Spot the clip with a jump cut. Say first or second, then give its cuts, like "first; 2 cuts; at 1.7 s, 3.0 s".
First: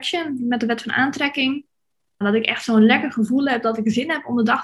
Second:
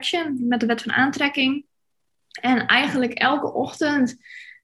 first; 1 cut; at 2.2 s